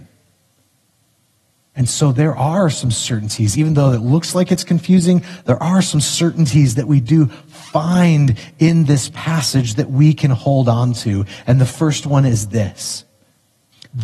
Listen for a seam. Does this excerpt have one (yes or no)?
yes